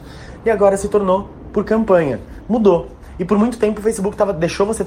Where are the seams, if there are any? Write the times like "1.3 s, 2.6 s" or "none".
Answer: none